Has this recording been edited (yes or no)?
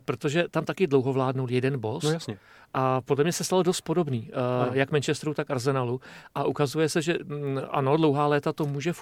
no